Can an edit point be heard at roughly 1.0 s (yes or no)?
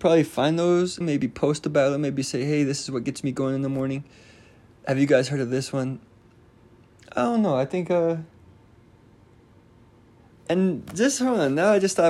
yes